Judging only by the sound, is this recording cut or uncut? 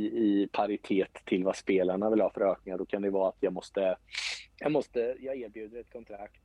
cut